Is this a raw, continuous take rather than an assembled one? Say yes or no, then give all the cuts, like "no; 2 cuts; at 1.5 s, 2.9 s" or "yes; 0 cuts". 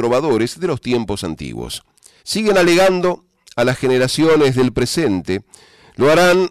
no; 1 cut; at 2.2 s